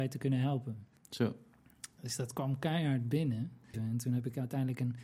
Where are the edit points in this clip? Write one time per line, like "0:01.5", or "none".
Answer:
0:01.0
0:03.7